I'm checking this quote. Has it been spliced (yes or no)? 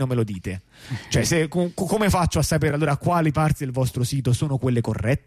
no